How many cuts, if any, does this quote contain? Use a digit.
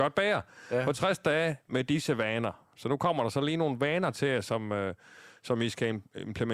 0